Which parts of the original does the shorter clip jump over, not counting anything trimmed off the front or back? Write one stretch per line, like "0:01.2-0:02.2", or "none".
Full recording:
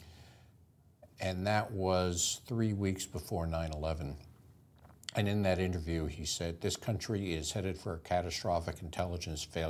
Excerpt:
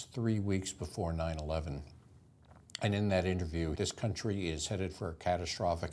0:06.1-0:06.6